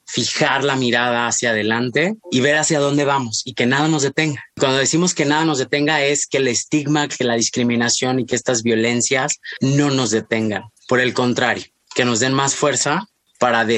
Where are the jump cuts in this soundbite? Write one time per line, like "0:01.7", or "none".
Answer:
0:02.2